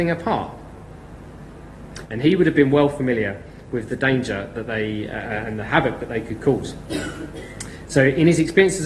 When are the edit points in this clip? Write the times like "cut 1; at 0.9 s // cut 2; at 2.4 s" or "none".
cut 1; at 2.1 s

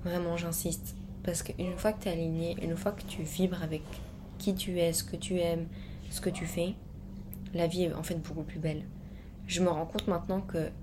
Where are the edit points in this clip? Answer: none

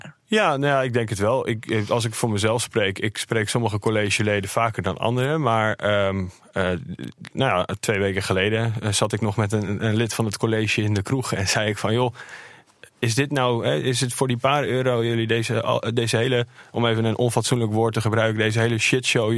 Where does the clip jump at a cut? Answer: none

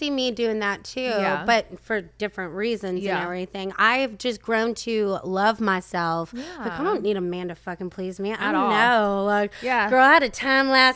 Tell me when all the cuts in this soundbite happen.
none

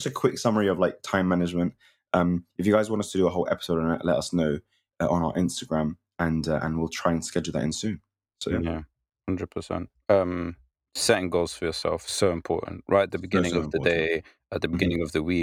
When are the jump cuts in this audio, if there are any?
none

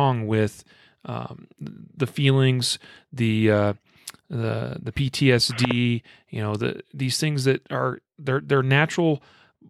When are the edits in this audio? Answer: none

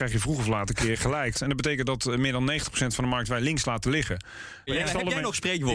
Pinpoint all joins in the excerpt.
cut 1; at 1.3 s // cut 2; at 4.7 s

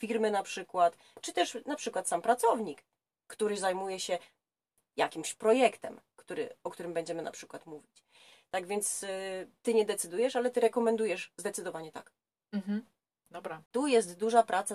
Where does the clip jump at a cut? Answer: none

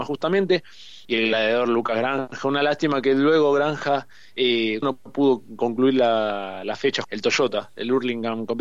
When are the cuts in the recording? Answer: cut 1; at 1.1 s // cut 2; at 4.8 s // cut 3; at 7.0 s

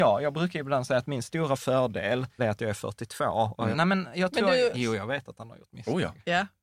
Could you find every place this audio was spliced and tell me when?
cut 1; at 2.4 s // cut 2; at 3.7 s // cut 3; at 4.7 s

